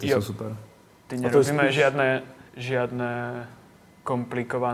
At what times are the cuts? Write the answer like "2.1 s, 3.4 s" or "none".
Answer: 1.1 s, 2.5 s